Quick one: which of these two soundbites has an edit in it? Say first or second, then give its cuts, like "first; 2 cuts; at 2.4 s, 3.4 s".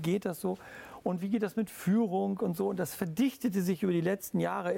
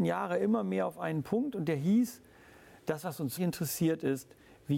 second; 1 cut; at 3.4 s